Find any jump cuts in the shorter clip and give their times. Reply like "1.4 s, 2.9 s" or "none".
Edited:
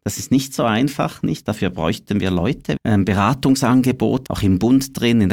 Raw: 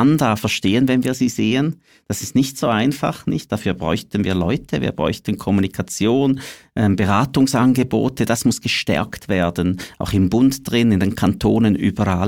2.8 s, 4.3 s